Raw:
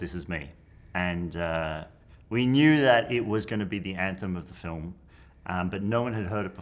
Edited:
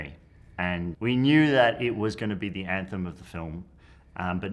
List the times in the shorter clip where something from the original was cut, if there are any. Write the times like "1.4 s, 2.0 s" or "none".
0.9 s